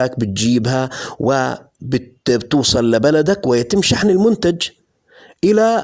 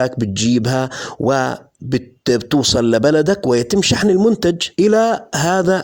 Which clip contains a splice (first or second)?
second